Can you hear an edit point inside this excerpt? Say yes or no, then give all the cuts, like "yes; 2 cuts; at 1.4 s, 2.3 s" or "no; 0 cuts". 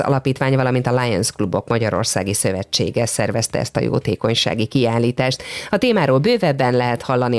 no; 0 cuts